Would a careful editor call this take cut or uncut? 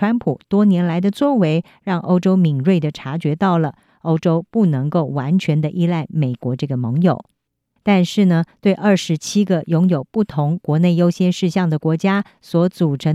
cut